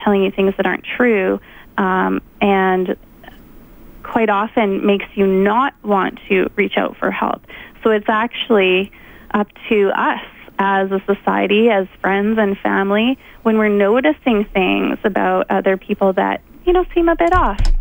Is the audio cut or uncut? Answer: uncut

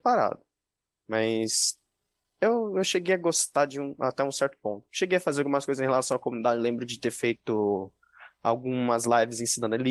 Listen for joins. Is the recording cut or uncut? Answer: uncut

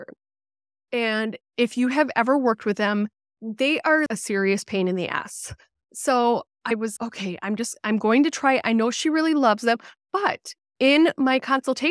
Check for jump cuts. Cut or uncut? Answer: cut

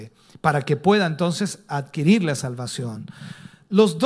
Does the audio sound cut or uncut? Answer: uncut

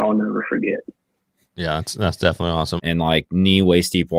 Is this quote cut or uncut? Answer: cut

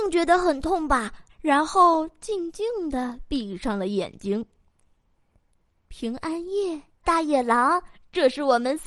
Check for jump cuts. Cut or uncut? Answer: cut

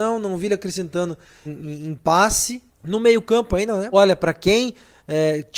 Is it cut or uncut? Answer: cut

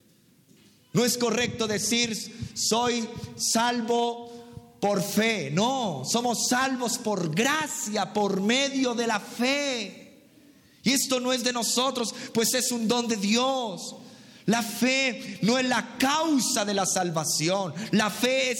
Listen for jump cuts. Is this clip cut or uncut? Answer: uncut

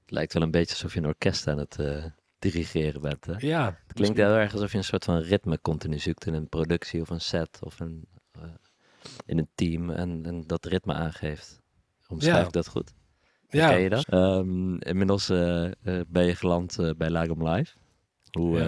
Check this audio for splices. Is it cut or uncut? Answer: cut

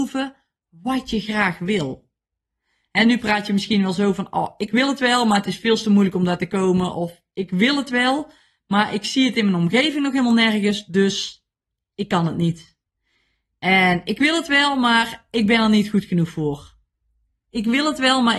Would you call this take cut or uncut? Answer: uncut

